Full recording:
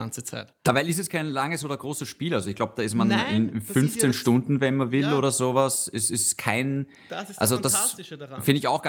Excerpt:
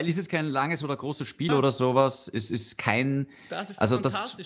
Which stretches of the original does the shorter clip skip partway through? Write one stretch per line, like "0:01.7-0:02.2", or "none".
0:02.3-0:05.1